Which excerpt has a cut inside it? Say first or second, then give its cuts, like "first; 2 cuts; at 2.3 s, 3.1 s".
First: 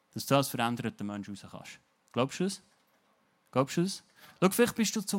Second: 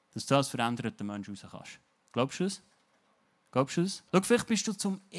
second; 1 cut; at 4.1 s